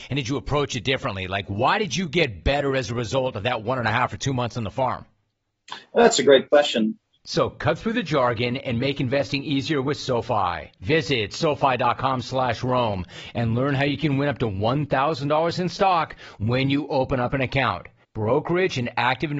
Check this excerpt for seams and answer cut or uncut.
cut